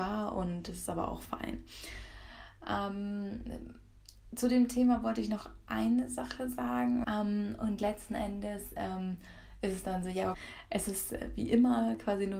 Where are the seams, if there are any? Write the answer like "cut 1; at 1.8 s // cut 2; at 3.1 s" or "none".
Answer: cut 1; at 7.0 s // cut 2; at 10.3 s